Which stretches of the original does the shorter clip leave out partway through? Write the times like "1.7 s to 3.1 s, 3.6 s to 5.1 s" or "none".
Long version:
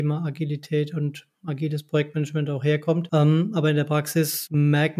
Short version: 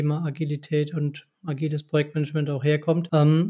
none